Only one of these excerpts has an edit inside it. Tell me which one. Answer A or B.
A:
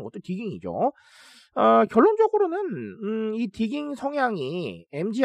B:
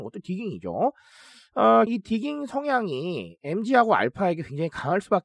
B